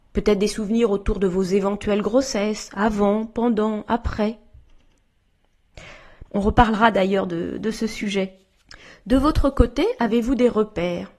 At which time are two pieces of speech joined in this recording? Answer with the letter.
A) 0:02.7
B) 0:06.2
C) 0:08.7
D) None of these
B